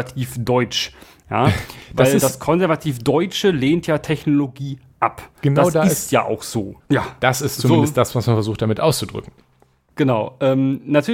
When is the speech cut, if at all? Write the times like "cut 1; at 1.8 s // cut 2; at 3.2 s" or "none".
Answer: cut 1; at 6.8 s